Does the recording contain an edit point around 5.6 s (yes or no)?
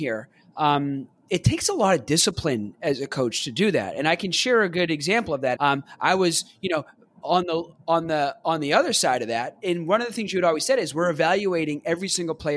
yes